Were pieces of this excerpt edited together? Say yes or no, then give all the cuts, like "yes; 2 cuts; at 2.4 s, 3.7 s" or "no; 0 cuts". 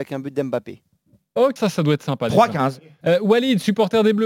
yes; 2 cuts; at 1.6 s, 3.0 s